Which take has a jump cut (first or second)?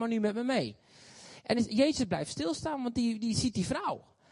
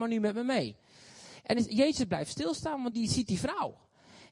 second